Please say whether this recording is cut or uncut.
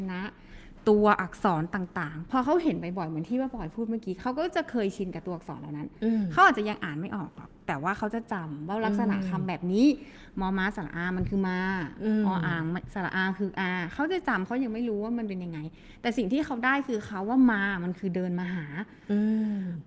uncut